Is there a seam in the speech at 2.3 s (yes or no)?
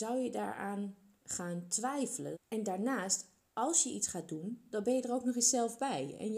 yes